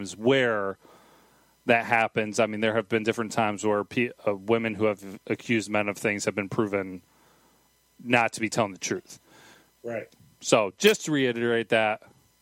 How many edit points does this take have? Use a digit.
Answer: 0